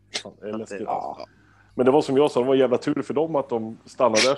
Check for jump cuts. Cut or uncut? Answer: cut